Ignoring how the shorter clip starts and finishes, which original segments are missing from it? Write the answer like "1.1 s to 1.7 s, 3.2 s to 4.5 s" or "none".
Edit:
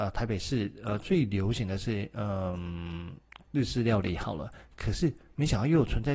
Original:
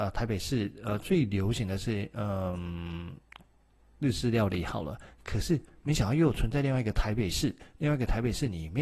3.4 s to 3.9 s